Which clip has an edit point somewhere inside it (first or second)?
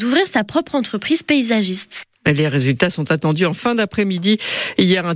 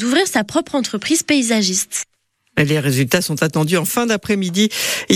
first